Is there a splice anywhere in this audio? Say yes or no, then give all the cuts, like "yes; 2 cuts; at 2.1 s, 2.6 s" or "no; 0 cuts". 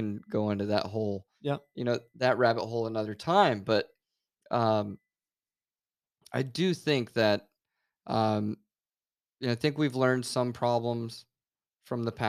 no; 0 cuts